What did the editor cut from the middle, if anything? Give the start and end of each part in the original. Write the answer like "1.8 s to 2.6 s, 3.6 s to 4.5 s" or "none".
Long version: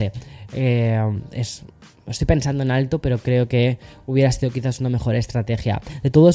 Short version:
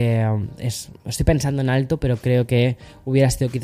1.7 s to 2.0 s